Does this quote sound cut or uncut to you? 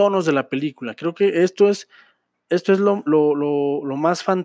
uncut